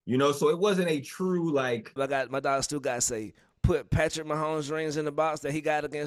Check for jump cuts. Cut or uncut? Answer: cut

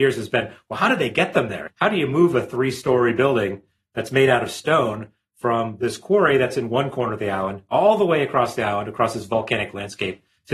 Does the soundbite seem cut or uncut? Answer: uncut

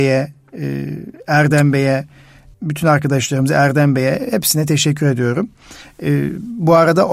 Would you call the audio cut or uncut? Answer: cut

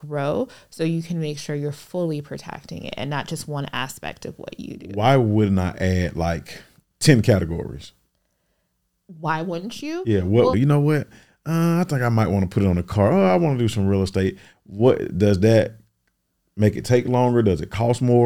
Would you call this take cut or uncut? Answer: cut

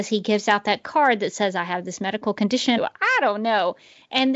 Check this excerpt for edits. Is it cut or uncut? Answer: cut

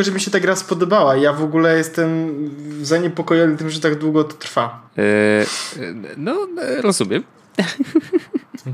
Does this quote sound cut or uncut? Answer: cut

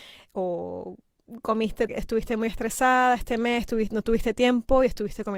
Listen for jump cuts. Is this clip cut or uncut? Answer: cut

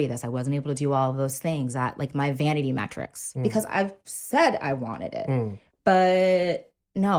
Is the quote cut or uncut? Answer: cut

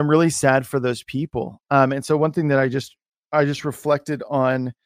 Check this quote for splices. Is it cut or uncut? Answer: uncut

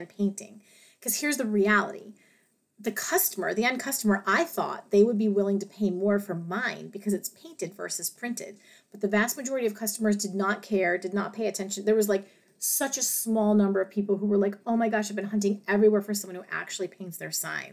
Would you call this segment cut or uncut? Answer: uncut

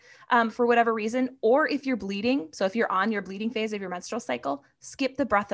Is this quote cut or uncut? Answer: uncut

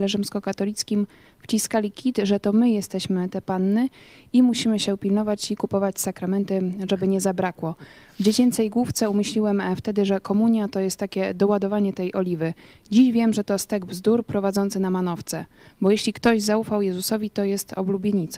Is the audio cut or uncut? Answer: uncut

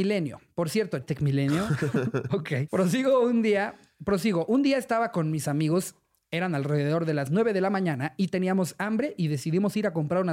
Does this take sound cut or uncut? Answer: cut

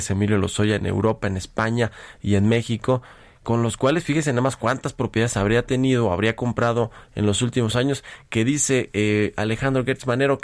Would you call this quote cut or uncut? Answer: uncut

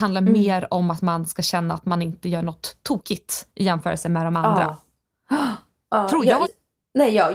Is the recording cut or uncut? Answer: cut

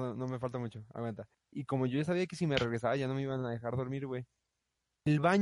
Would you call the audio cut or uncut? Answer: cut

